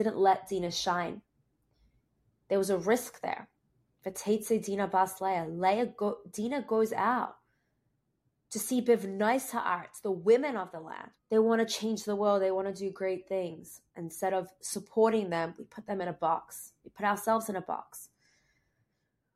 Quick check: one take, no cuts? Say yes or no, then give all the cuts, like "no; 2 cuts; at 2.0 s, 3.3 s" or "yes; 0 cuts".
no; 1 cut; at 11.2 s